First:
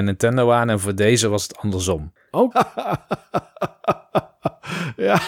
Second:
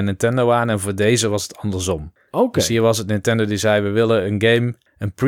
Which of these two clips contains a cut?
first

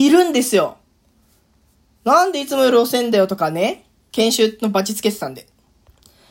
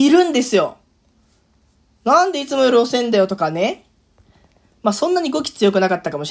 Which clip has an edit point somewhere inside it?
first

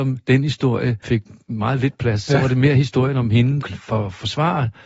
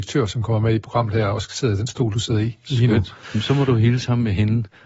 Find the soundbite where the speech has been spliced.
first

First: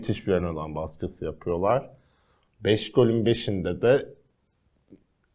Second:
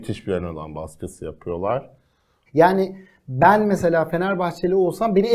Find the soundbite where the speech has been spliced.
second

